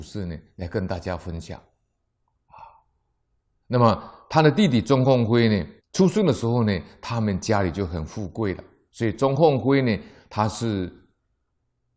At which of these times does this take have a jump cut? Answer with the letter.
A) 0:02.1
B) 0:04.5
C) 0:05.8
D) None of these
C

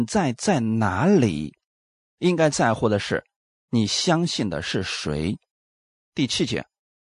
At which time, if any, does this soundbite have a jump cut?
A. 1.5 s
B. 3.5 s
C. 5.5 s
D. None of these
D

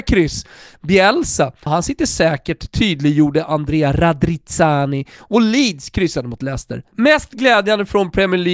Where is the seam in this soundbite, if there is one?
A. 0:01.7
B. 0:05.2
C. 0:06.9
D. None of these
A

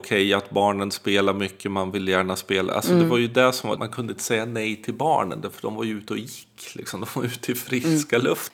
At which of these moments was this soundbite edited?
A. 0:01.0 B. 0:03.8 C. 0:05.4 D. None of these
B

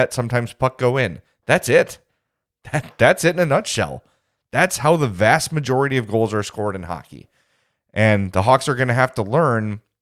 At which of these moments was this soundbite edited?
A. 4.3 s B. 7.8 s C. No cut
C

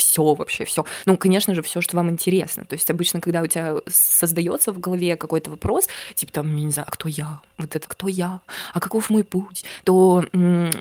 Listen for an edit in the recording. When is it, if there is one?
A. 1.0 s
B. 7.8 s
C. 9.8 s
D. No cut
B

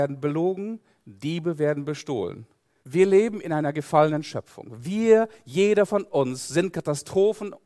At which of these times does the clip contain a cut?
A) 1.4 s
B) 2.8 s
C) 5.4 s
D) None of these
B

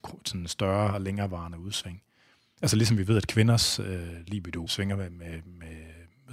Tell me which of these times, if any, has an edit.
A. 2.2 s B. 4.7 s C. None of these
B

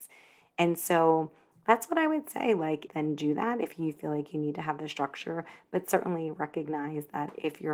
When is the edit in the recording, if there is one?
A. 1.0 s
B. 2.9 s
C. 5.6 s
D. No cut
B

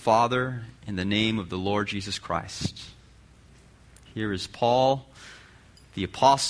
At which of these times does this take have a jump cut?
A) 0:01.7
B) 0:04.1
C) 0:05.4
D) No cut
B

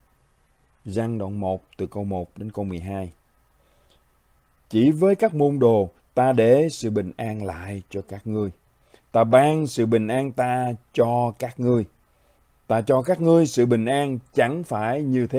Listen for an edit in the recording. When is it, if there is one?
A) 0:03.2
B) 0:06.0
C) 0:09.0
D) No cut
B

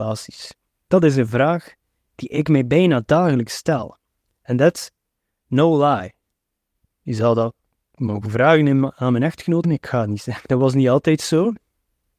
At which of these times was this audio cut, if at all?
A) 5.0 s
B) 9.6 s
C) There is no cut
B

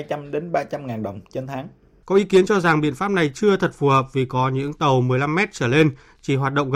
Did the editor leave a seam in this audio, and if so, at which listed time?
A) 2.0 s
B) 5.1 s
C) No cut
A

